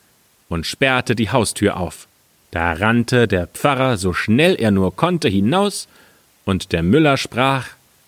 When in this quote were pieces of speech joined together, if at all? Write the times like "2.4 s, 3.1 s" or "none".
2.4 s